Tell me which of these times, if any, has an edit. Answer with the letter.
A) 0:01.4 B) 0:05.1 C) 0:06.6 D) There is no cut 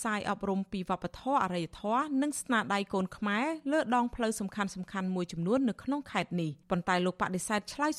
C